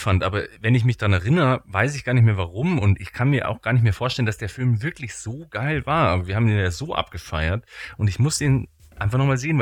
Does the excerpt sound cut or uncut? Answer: uncut